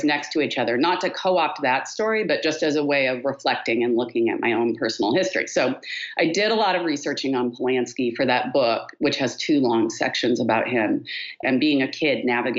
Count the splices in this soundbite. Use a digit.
1